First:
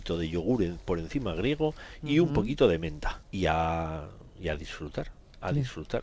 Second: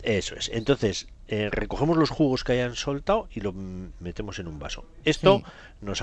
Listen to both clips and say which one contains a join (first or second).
first